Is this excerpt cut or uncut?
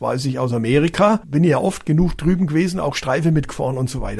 uncut